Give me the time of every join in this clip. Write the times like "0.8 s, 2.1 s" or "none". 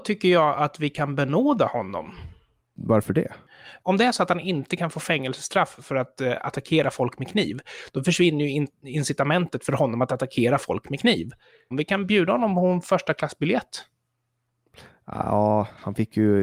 11.7 s